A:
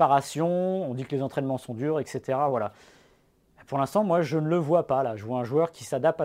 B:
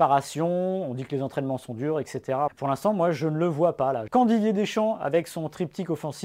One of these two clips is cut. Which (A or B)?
B